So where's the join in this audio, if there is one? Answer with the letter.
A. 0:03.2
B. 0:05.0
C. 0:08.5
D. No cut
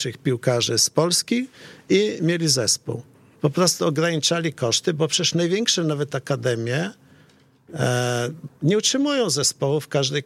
C